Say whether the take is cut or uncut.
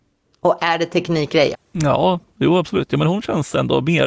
cut